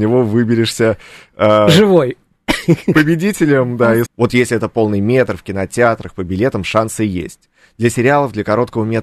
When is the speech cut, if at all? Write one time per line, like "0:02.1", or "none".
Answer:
0:04.0